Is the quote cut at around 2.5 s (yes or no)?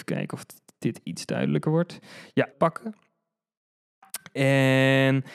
yes